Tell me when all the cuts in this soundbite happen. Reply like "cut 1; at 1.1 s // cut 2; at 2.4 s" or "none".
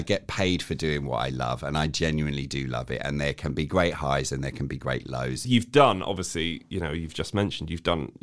cut 1; at 5.4 s